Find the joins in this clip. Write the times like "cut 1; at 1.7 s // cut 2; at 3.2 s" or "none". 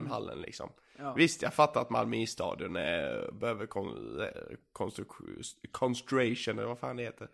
none

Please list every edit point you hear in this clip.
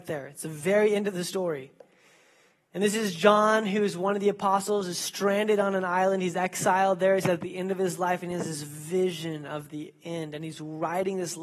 none

